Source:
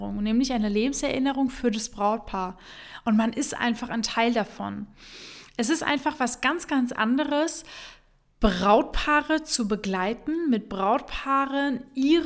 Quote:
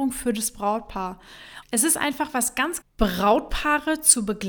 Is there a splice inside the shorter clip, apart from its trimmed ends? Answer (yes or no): yes